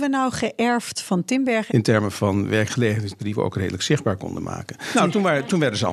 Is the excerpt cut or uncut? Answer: cut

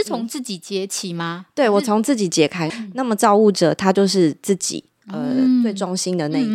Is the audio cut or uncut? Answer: cut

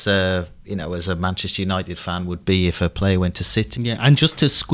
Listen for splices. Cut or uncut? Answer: cut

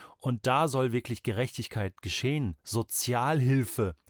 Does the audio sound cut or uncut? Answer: uncut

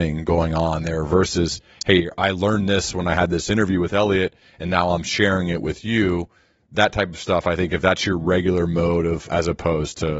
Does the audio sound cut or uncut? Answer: cut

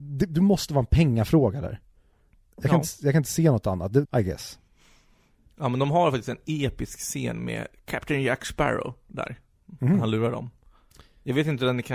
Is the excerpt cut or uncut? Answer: cut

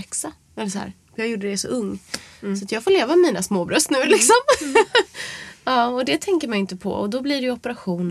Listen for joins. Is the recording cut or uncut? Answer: uncut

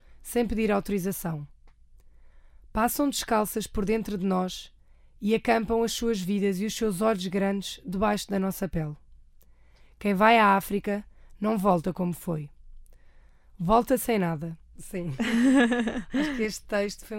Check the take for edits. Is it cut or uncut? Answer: cut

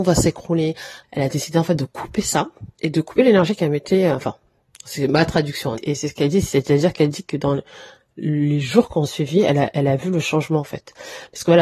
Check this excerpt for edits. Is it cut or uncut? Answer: cut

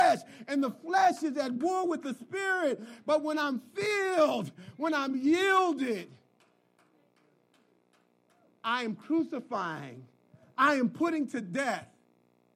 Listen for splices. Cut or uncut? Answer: uncut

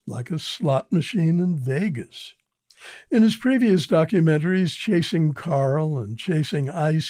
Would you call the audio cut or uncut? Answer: uncut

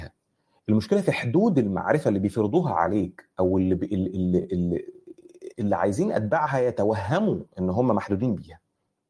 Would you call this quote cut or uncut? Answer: uncut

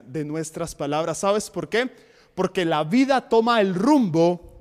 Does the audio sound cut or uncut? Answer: uncut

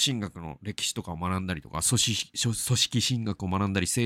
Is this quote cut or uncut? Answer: uncut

